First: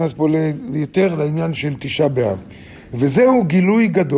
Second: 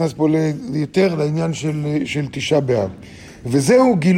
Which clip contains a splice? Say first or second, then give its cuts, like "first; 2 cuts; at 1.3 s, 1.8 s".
first; 1 cut; at 1.5 s